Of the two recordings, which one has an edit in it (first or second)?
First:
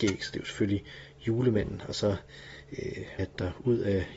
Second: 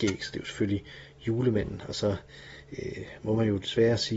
first